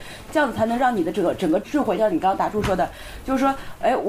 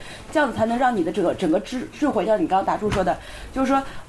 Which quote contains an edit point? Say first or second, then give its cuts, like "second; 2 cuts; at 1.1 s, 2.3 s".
first; 1 cut; at 1.6 s